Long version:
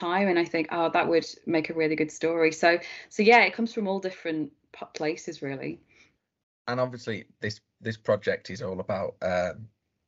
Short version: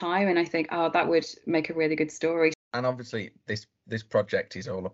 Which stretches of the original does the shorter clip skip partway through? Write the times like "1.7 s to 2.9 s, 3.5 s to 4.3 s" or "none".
2.5 s to 6.5 s